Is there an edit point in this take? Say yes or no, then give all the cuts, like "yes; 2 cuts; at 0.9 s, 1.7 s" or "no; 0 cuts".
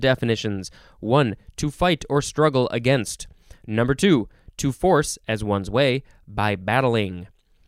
no; 0 cuts